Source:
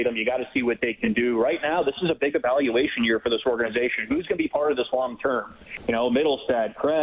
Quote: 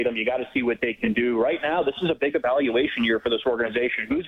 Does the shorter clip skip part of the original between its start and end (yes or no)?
no